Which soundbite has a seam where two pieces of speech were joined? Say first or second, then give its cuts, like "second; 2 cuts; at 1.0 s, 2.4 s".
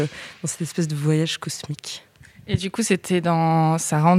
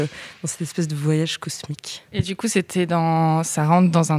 second; 1 cut; at 2.1 s